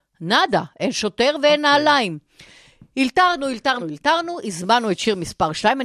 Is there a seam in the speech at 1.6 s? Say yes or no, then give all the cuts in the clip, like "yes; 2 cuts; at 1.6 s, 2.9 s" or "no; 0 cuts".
no; 1 cut; at 3.8 s